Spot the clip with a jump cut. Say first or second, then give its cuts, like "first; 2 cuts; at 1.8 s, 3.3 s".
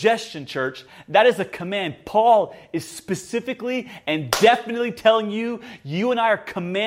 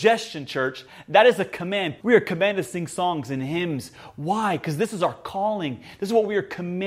second; 1 cut; at 2.0 s